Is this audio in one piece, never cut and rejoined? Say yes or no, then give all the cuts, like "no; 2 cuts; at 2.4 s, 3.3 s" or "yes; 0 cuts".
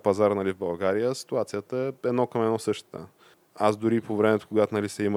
no; 1 cut; at 3.3 s